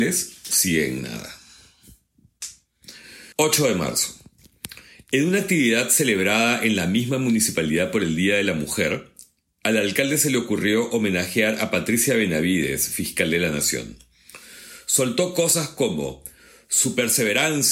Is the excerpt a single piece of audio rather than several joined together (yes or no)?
no